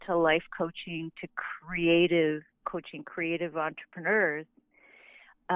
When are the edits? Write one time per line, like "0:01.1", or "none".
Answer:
0:02.6